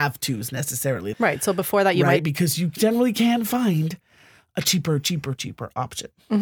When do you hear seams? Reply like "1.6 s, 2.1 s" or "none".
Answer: 1.1 s, 2.2 s, 5.4 s

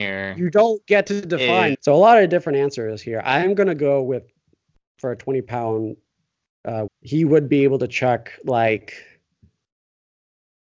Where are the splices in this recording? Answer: 1.7 s, 6.9 s

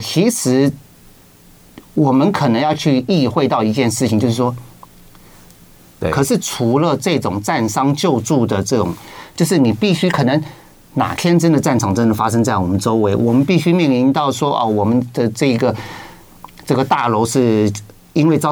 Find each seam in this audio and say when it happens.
6.0 s

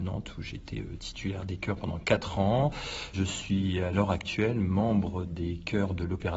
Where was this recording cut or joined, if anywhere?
3.1 s

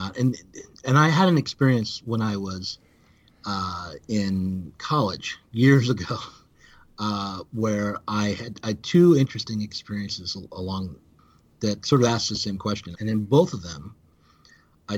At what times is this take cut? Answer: 12.9 s

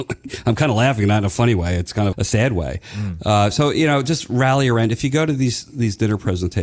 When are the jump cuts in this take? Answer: 2.1 s

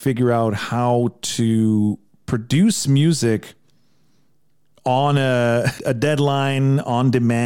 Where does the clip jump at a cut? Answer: 5.8 s

